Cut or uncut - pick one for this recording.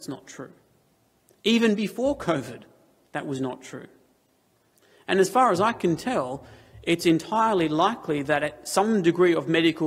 uncut